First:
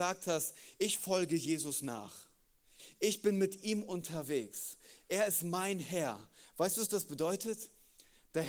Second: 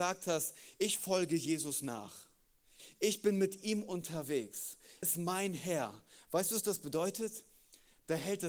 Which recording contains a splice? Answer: second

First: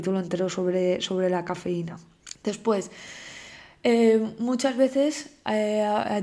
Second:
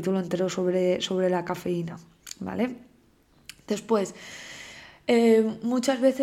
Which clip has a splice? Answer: first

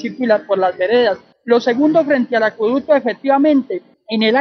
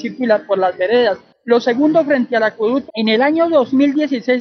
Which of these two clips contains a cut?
second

